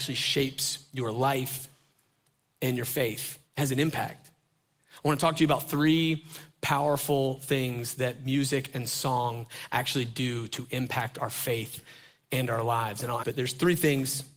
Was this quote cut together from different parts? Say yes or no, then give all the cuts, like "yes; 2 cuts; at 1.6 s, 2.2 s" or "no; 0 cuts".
yes; 2 cuts; at 3.5 s, 13.2 s